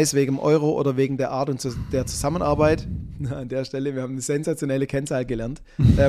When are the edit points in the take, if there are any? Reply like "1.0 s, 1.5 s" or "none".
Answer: none